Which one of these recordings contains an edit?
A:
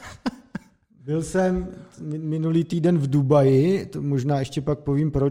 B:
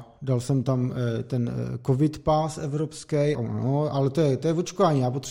B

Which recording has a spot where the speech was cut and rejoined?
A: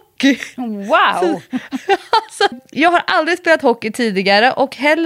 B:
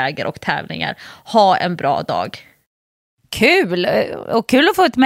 A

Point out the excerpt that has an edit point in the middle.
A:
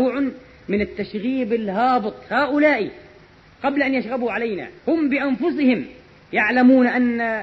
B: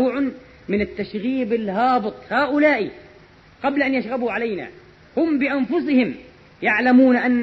A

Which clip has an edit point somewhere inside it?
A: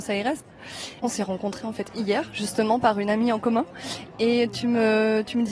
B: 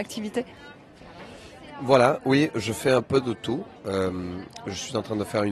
B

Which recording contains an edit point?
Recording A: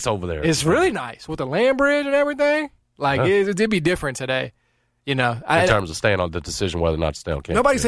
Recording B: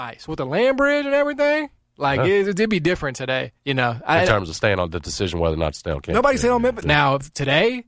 B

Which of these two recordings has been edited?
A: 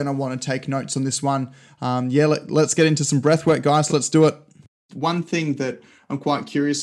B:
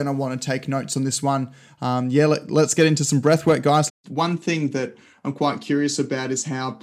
B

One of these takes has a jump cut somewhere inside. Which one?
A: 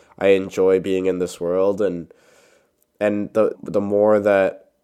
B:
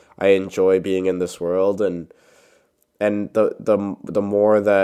A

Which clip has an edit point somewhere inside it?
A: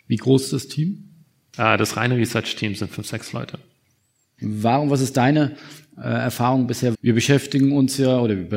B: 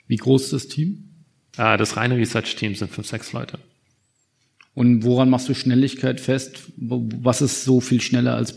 A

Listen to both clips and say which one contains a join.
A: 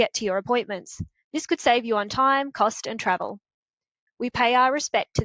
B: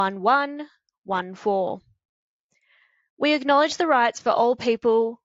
A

